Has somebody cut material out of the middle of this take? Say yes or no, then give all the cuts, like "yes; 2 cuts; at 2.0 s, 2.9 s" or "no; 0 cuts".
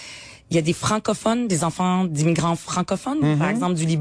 no; 0 cuts